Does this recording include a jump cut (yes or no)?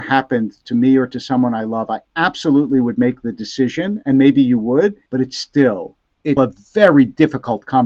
yes